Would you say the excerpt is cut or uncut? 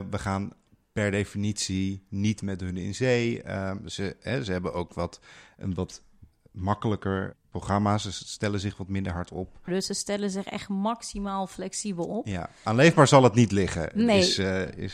cut